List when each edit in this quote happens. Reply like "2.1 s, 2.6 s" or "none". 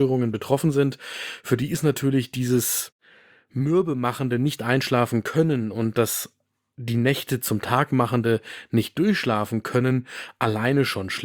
none